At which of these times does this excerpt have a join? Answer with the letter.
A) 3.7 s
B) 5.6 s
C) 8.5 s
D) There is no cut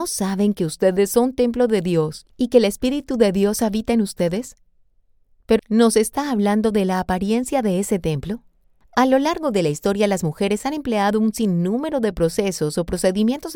B